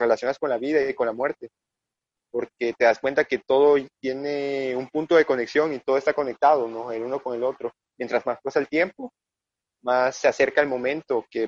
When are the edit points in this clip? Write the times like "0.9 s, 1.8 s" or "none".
none